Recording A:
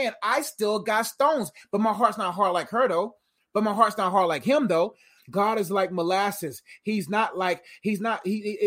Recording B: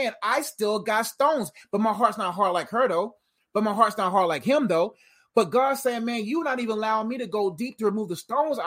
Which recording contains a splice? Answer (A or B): A